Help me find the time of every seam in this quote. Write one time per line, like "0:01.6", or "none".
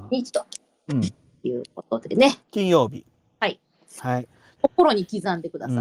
0:02.4
0:04.6